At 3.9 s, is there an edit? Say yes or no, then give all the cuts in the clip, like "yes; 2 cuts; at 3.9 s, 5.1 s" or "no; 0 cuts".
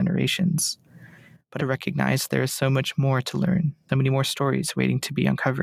yes; 2 cuts; at 1.6 s, 3.9 s